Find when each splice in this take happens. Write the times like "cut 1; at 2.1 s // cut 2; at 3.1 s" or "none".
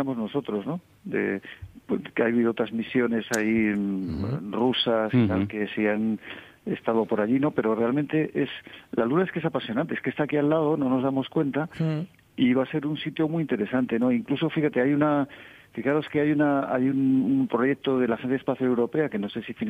none